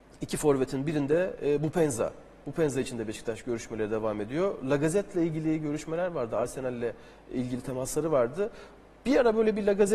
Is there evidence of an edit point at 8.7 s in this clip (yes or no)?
no